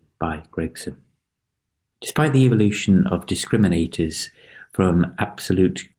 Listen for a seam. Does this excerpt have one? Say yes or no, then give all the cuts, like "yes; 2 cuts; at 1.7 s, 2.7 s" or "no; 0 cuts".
no; 0 cuts